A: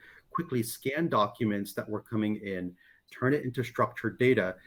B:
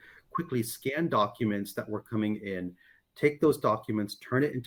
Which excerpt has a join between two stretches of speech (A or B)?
A